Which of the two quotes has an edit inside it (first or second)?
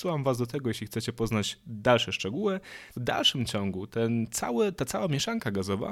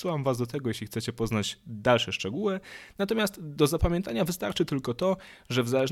first